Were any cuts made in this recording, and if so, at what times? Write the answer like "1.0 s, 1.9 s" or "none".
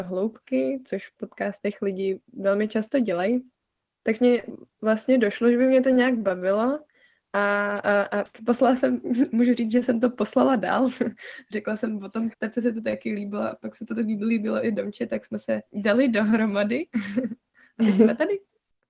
12.3 s, 15.7 s